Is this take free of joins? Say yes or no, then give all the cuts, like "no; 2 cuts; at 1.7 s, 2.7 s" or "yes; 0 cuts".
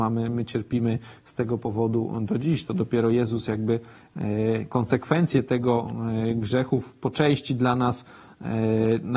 yes; 0 cuts